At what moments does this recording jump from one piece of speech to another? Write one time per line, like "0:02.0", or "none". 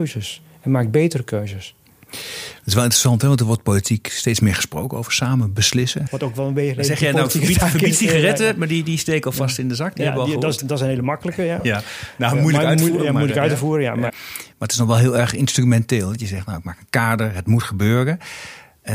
0:06.1
0:14.1